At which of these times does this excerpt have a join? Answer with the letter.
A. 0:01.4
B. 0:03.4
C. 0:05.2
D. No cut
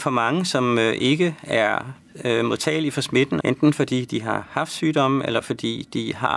B